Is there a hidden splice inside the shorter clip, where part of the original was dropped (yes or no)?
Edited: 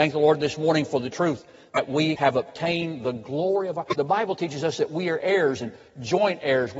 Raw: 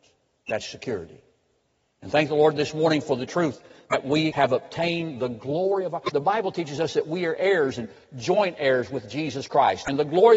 no